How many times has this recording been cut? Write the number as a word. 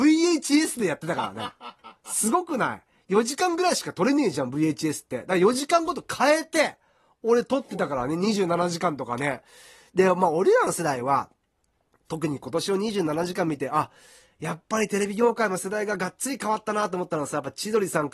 zero